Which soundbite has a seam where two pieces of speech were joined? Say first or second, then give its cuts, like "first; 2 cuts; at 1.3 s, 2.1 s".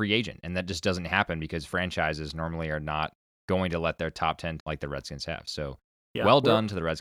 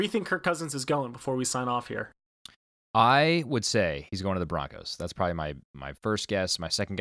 first; 1 cut; at 4.6 s